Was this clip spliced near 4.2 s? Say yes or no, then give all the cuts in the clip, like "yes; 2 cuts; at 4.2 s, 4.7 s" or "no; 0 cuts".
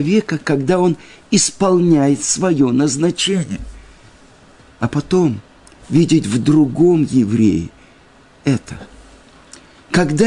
no; 0 cuts